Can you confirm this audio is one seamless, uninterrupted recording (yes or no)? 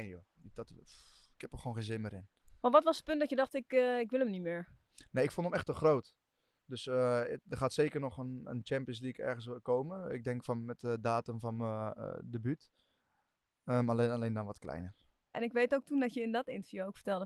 no